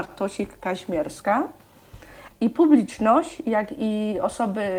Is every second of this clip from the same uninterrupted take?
no; 1 cut; at 2.3 s

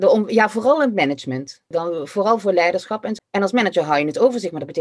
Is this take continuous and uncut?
no; 2 cuts; at 1.7 s, 3.2 s

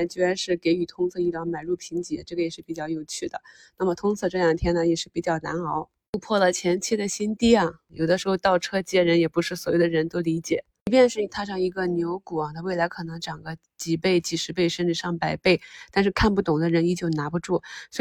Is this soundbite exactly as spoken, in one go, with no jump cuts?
no; 1 cut; at 7.9 s

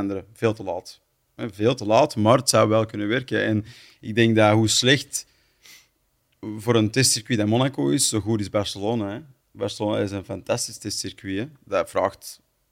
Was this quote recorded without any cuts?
yes; 0 cuts

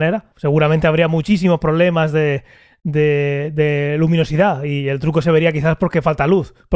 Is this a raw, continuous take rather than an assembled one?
yes; 0 cuts

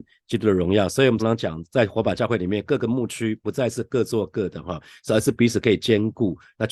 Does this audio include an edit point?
yes; 1 cut; at 1.2 s

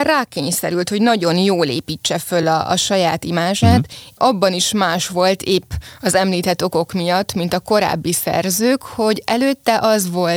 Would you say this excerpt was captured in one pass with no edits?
yes; 0 cuts

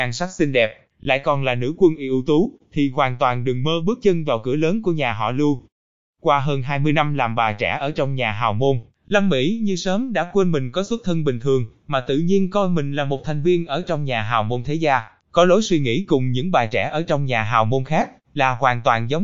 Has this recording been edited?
no; 0 cuts

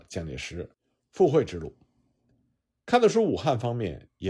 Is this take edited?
no; 0 cuts

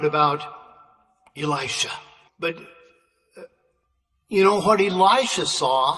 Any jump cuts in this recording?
yes; 1 cut; at 2.3 s

